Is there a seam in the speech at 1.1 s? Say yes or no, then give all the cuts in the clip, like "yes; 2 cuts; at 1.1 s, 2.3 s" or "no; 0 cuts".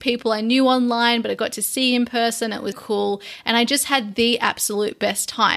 no; 1 cut; at 2.7 s